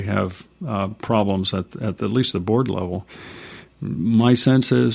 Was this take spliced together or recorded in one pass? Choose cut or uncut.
uncut